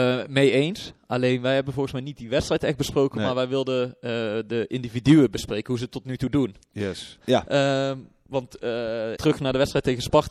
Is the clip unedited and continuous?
no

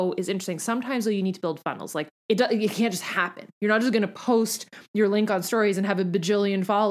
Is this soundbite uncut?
no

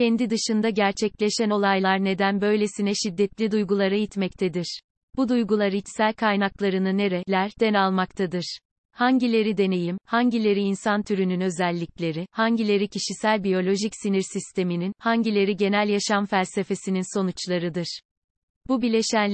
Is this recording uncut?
yes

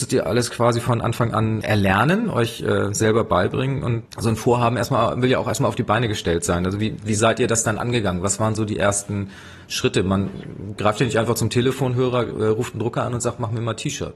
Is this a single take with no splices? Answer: yes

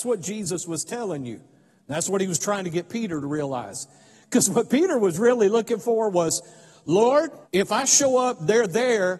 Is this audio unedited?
no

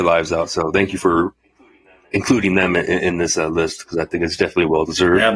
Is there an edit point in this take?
no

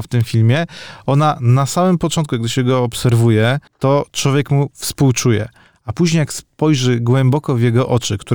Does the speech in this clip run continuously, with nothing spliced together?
no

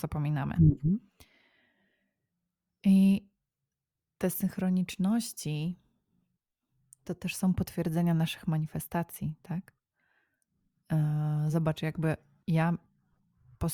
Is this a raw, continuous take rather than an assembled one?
yes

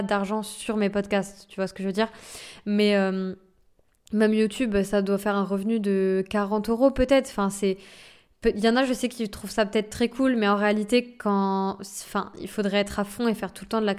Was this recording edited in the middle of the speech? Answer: no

